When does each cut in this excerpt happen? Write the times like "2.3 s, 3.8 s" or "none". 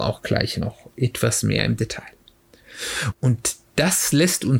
3.1 s